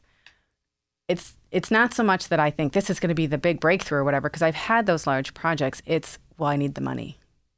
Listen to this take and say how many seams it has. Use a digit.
0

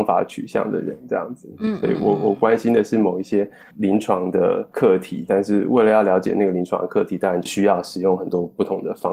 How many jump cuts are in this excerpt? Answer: 0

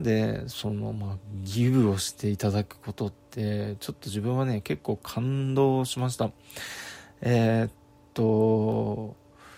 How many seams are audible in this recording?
0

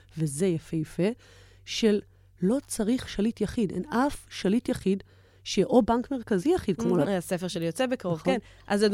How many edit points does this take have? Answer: 1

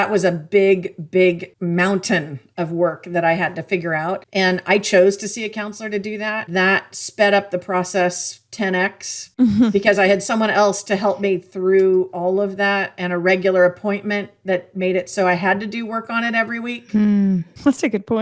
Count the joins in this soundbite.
1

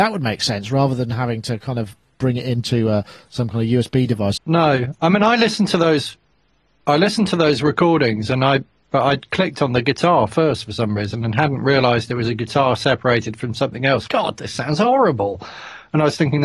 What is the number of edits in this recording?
2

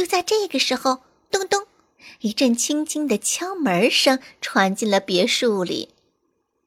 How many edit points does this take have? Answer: 1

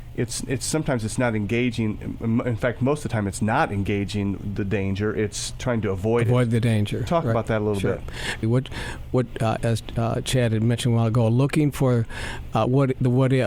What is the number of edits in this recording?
2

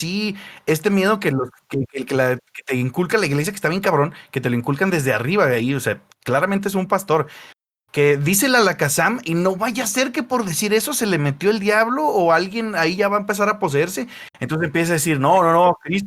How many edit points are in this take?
0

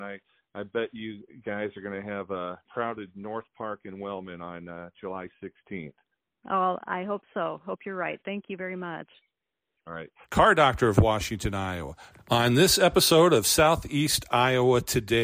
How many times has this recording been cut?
3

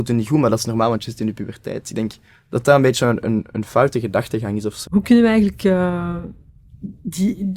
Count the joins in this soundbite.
1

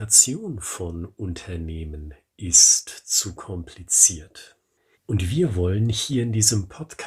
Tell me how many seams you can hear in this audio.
1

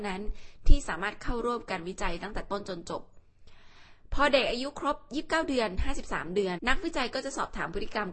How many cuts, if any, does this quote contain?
1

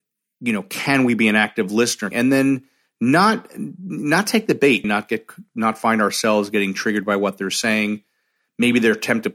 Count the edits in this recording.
2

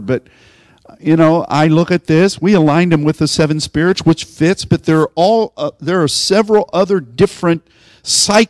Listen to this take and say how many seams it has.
0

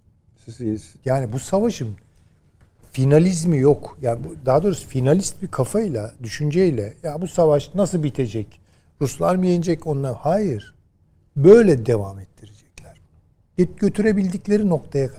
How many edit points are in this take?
1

